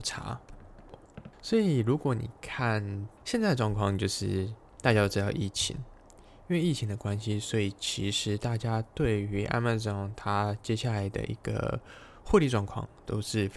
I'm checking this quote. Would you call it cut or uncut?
cut